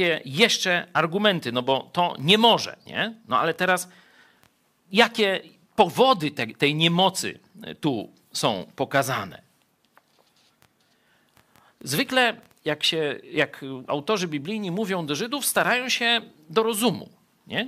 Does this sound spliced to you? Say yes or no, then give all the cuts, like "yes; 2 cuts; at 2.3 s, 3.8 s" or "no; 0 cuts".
no; 0 cuts